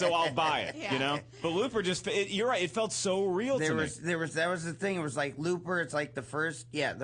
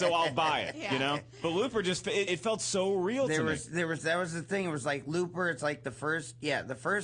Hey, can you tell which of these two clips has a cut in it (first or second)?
second